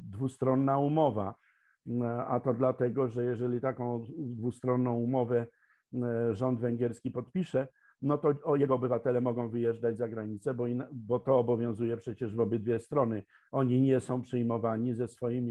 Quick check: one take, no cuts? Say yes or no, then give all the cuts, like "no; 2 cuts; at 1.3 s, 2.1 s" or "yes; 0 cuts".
yes; 0 cuts